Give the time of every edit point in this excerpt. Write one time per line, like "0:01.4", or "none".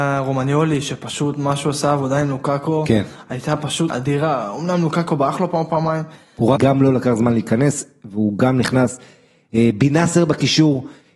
0:03.9
0:06.6